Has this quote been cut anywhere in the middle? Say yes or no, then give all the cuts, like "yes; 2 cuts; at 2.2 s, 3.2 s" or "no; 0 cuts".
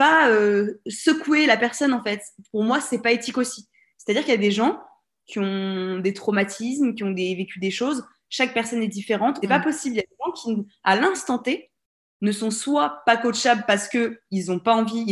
yes; 1 cut; at 9.4 s